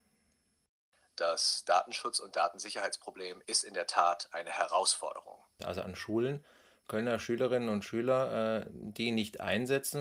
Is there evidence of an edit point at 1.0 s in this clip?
no; 2 cuts; at 3.4 s, 5.6 s

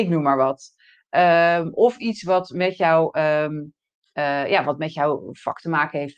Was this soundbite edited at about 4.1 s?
no; 0 cuts

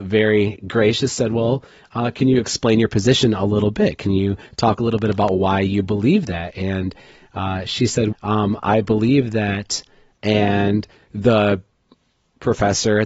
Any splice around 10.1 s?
yes; 2 cuts; at 8.1 s, 10.1 s

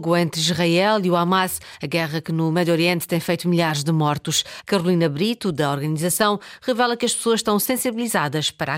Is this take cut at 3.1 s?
no; 1 cut; at 4.6 s

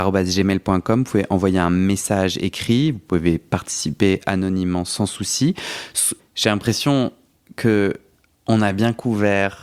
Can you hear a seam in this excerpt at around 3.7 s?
no; 1 cut; at 6.2 s

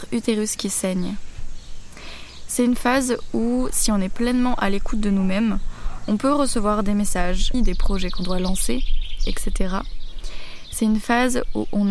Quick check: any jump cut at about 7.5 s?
yes; 1 cut; at 7.5 s

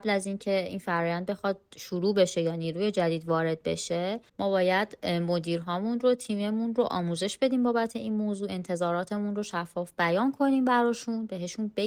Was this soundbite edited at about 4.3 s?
yes; 1 cut; at 4.3 s

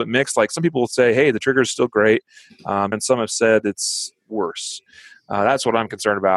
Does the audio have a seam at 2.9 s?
yes; 1 cut; at 2.9 s

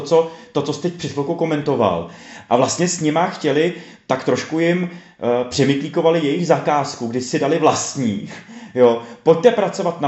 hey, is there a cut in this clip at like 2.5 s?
yes; 1 cut; at 2.5 s

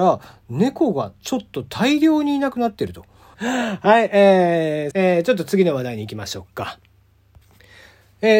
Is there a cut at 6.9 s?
no; 2 cuts; at 3.3 s, 4.9 s

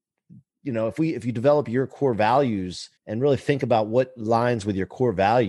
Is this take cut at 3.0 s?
yes; 1 cut; at 3.0 s

